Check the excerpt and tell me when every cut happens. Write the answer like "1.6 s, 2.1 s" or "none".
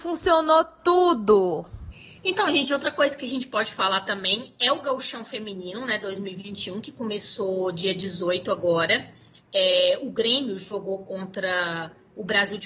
9.4 s